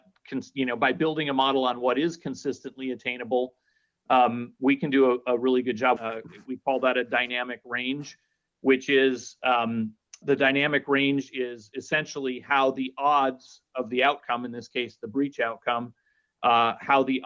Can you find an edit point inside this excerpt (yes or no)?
yes